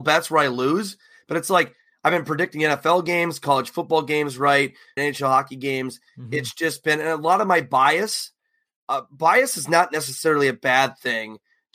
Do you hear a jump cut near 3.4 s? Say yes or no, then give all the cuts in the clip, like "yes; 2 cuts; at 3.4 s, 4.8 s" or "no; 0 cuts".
no; 1 cut; at 5.0 s